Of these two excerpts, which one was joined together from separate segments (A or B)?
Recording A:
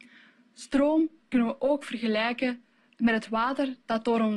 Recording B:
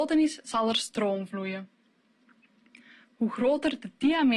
B